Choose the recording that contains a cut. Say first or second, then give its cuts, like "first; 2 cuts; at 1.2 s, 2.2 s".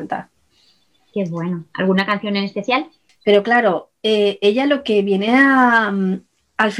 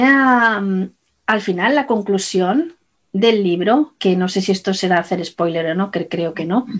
first; 1 cut; at 3.1 s